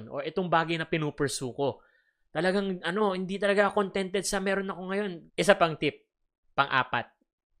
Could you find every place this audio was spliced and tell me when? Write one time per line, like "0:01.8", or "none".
0:05.3